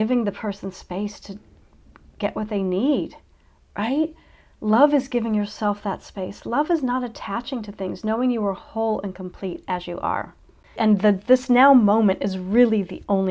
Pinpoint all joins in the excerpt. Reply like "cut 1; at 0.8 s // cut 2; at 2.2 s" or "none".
cut 1; at 10.8 s